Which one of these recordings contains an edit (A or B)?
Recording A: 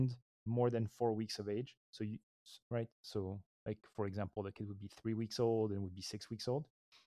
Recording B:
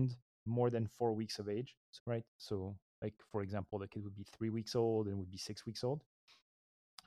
B